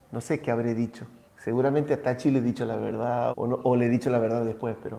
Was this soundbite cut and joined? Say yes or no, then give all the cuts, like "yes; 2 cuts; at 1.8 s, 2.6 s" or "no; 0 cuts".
yes; 2 cuts; at 1.2 s, 3.3 s